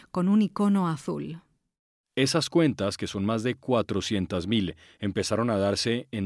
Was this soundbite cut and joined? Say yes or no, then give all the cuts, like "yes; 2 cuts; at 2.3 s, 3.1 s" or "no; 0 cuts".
no; 0 cuts